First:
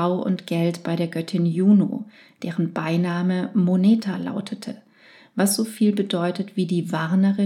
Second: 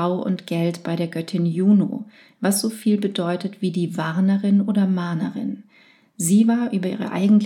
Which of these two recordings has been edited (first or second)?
second